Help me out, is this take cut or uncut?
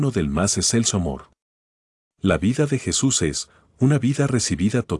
cut